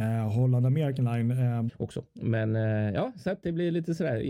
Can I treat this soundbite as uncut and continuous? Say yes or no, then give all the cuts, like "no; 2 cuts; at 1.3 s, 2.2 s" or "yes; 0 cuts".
no; 1 cut; at 1.7 s